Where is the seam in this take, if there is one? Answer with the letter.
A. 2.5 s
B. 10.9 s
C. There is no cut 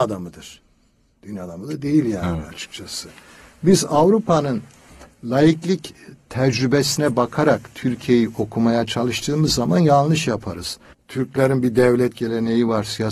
B